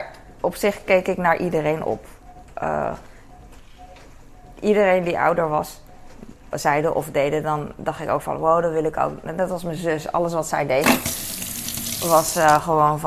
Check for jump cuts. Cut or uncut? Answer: cut